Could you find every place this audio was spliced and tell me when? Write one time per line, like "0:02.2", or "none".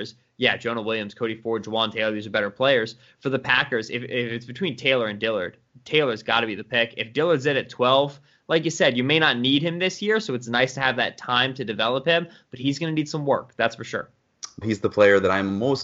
0:14.6